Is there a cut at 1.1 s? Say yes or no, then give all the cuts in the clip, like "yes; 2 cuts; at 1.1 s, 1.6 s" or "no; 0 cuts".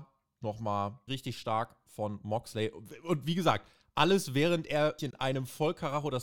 yes; 2 cuts; at 1.1 s, 5.0 s